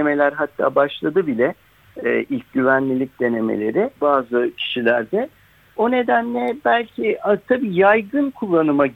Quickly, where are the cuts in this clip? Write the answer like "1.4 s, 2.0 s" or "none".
4.0 s

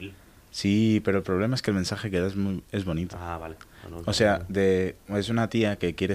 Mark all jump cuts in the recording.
none

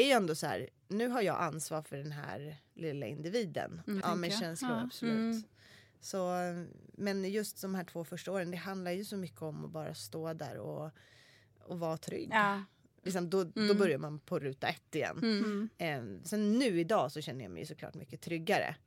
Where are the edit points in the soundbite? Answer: 4.0 s, 13.1 s

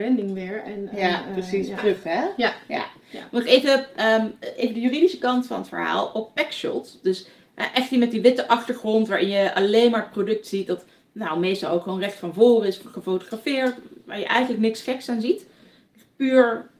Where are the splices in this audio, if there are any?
1.8 s

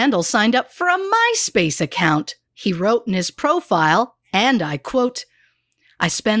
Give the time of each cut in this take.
2.4 s

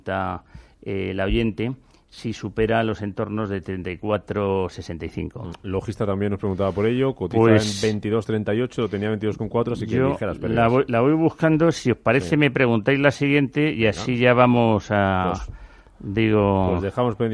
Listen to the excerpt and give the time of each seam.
none

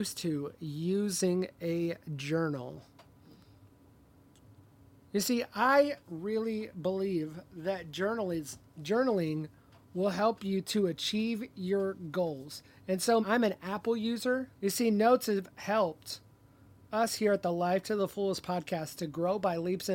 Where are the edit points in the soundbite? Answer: 6.0 s, 13.2 s, 14.6 s

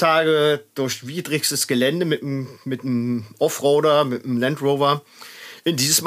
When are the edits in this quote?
none

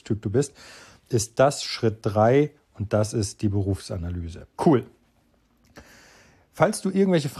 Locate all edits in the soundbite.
4.5 s

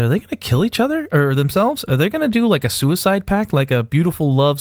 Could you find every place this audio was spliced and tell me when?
none

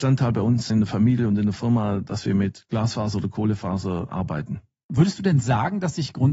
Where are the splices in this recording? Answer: none

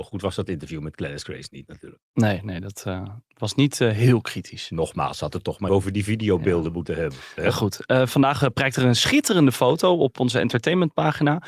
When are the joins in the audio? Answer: 5.7 s

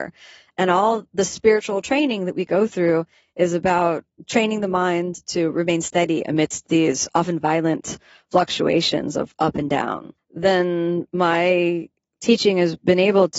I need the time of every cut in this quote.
10.2 s

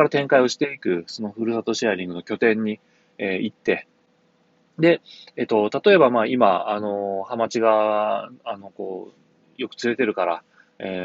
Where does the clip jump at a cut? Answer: none

